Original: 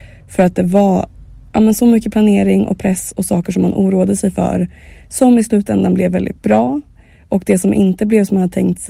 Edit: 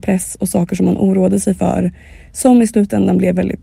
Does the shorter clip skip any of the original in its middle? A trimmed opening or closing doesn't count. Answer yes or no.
no